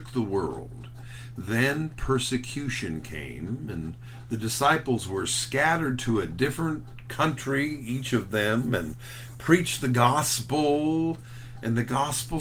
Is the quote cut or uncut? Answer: cut